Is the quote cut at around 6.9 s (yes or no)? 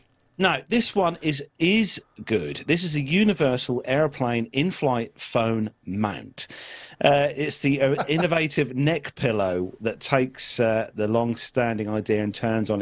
yes